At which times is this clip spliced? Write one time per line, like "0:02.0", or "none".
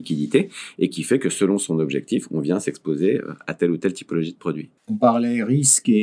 0:04.8